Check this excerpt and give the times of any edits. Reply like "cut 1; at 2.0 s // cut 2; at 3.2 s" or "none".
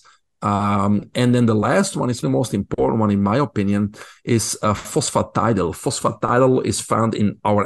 cut 1; at 2.2 s